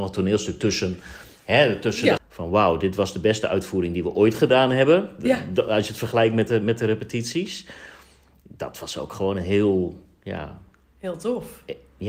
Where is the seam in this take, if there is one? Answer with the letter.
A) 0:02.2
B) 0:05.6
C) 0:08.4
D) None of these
A